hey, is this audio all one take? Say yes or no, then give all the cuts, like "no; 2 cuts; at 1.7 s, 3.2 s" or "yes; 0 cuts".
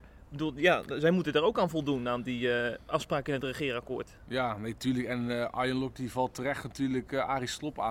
yes; 0 cuts